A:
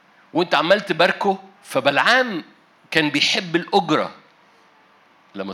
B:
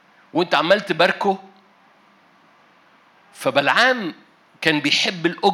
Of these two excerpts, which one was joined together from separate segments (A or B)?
A